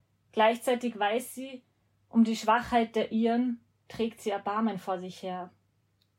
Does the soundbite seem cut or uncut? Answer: cut